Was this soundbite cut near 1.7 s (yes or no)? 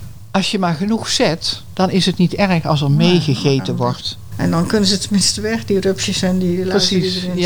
no